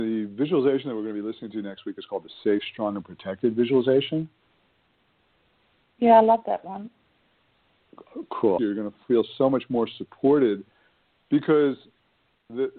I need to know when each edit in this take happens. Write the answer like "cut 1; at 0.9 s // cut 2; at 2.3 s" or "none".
cut 1; at 8.6 s